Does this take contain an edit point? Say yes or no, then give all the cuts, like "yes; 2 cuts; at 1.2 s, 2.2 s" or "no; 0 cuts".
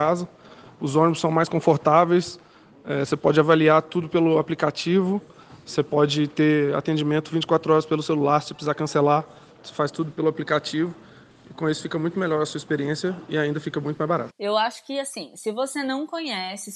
yes; 1 cut; at 14.3 s